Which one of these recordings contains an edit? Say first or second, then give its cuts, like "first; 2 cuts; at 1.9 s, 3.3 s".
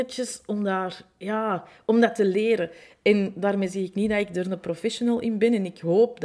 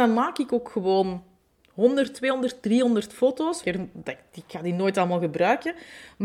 second; 1 cut; at 3.6 s